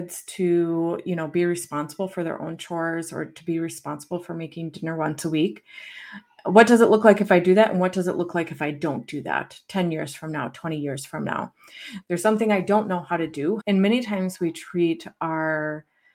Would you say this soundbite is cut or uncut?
cut